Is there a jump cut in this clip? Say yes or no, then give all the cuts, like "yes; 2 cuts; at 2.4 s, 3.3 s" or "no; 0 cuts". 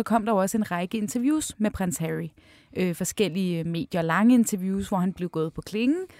no; 0 cuts